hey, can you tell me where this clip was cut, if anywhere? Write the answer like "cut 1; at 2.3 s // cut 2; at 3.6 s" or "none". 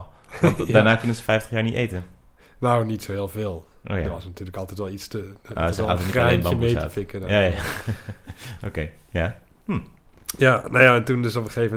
none